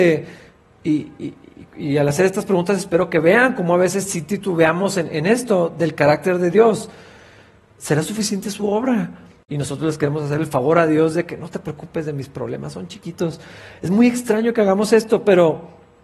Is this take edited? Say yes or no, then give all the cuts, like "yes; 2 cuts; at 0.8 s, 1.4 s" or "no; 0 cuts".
yes; 1 cut; at 9.4 s